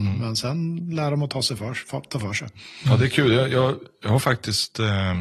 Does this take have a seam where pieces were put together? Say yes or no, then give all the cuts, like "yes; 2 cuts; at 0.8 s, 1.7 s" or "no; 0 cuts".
no; 0 cuts